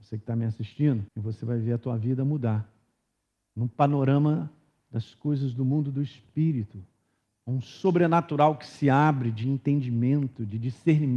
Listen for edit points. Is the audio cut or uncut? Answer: cut